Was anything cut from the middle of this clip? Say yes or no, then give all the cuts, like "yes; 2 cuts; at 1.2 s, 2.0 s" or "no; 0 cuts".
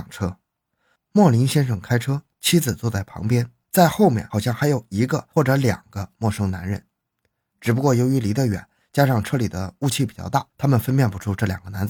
no; 0 cuts